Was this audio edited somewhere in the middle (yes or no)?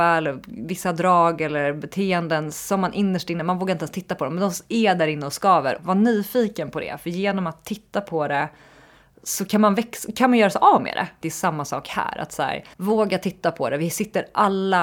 yes